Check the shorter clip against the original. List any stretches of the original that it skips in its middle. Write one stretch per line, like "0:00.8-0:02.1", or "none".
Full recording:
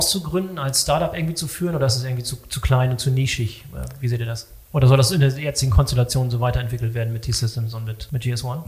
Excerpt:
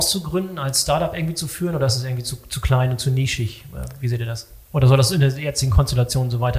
none